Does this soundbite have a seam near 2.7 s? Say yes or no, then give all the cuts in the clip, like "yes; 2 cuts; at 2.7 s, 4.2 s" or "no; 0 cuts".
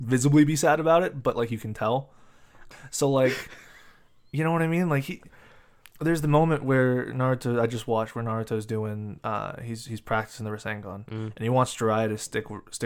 yes; 1 cut; at 2.7 s